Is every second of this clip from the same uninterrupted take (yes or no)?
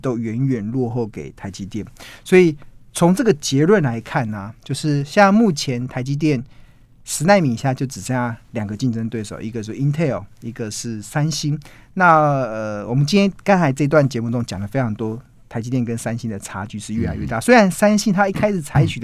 yes